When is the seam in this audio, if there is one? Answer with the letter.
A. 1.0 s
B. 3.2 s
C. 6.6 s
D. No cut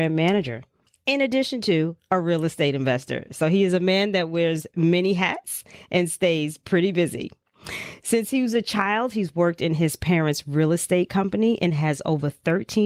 D